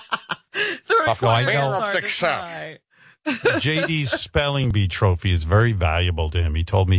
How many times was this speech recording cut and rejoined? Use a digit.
0